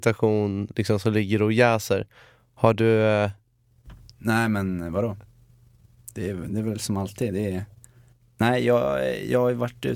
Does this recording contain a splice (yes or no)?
no